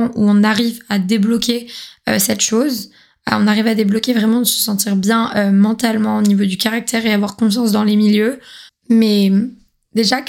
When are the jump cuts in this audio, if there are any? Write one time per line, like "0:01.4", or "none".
0:08.7